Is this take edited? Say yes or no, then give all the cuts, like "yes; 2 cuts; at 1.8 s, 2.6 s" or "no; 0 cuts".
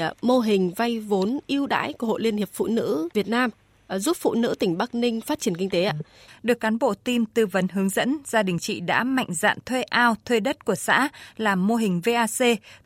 yes; 1 cut; at 6.3 s